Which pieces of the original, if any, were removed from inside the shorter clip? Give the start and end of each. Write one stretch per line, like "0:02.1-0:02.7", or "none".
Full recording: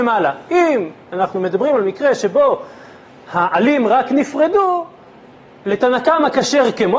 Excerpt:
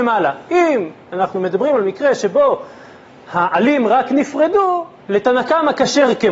0:05.0-0:05.5